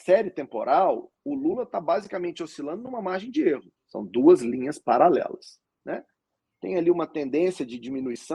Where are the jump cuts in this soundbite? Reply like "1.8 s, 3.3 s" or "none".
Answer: 3.8 s, 5.6 s